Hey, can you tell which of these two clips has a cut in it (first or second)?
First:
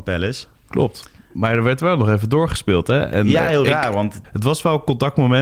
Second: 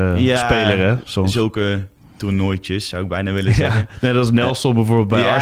first